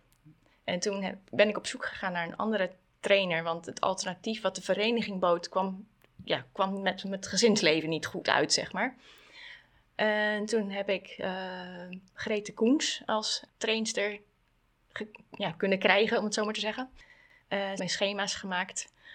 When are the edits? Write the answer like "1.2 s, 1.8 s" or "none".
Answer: 13.5 s, 17.8 s